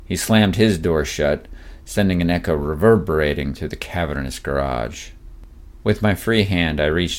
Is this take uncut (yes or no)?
no